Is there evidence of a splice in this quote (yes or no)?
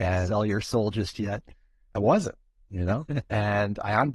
no